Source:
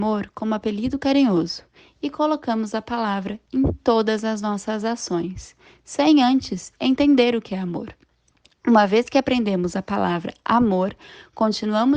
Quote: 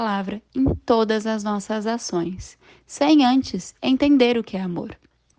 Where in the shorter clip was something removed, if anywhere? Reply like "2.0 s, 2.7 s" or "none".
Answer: none